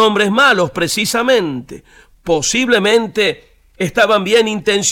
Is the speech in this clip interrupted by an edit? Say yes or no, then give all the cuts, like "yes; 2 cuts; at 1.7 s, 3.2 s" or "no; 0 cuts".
no; 0 cuts